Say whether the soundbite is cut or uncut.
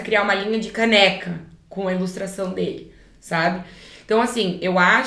uncut